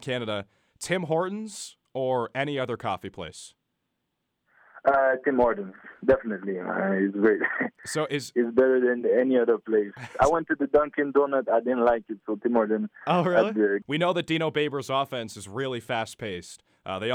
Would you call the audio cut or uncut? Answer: cut